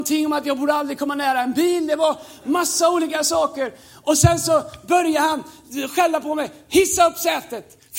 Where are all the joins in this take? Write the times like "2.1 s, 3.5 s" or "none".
none